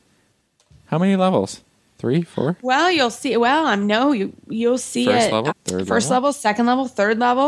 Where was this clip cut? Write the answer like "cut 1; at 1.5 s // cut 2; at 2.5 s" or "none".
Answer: cut 1; at 5.5 s